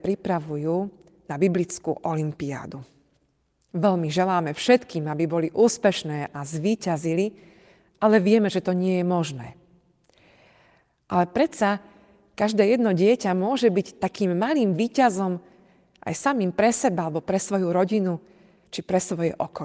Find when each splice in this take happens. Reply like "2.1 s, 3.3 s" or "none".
none